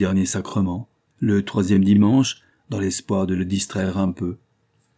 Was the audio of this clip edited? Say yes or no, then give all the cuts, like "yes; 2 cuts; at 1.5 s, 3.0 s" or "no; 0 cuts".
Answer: yes; 2 cuts; at 1.1 s, 2.5 s